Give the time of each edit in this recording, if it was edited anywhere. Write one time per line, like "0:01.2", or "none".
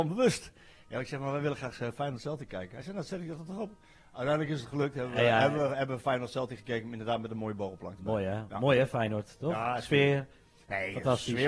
none